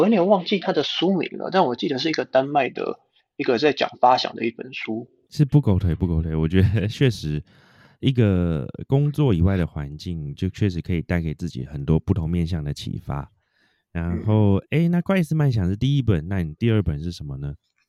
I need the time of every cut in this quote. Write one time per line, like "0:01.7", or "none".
0:05.3